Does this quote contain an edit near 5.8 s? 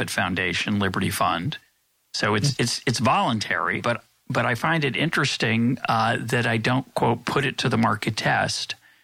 no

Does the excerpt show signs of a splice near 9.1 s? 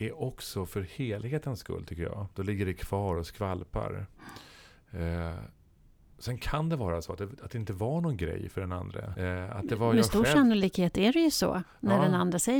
yes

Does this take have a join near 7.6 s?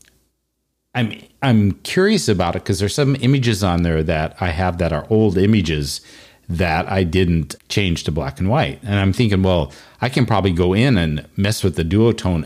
yes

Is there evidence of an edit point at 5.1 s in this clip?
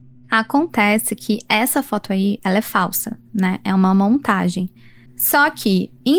yes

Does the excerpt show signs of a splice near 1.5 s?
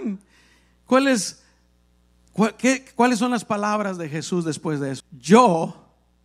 no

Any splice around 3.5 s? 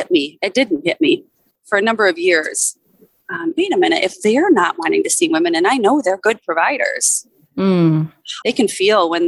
yes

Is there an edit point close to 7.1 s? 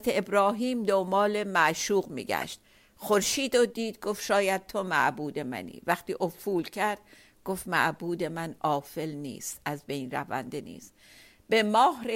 no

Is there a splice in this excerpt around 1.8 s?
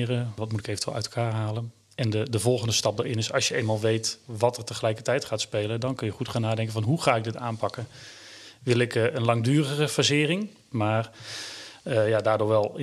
no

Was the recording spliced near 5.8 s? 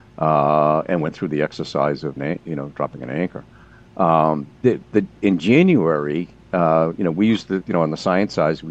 no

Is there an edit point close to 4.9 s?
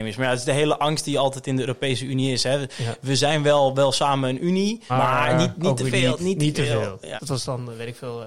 yes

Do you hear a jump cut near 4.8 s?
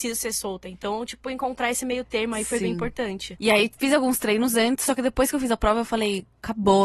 no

